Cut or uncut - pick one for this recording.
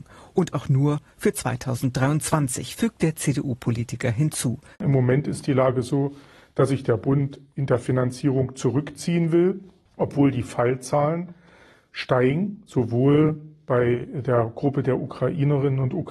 cut